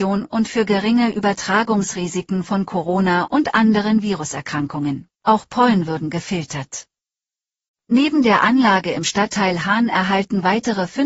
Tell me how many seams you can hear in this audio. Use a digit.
1